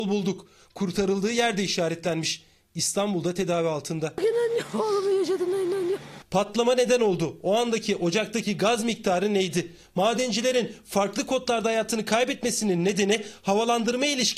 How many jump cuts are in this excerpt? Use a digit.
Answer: 0